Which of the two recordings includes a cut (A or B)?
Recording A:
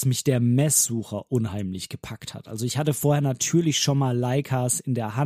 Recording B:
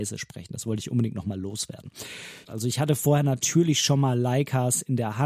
B